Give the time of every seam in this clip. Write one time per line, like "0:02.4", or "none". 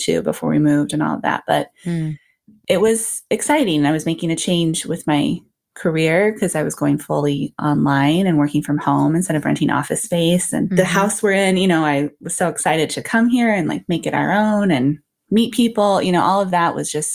none